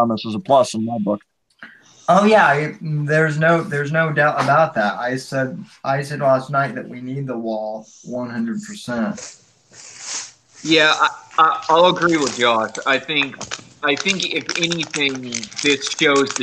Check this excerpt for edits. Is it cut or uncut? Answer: uncut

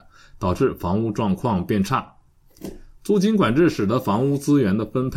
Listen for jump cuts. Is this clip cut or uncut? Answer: uncut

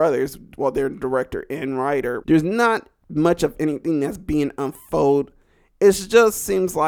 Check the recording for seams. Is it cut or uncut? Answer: cut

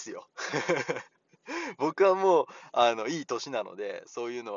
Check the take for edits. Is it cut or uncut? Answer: uncut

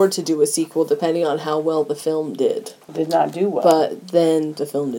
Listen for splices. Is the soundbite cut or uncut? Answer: uncut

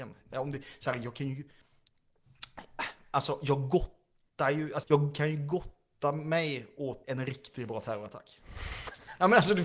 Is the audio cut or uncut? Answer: cut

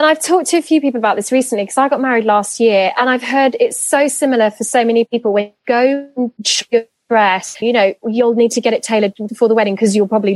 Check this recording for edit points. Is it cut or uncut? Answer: cut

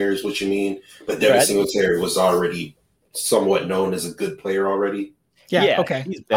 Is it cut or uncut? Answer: uncut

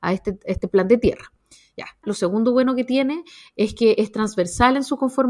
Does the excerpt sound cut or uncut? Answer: cut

